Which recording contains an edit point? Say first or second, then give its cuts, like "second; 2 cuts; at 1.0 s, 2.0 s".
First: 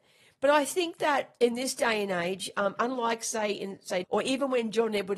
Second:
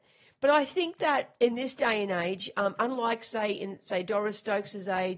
first; 1 cut; at 4.0 s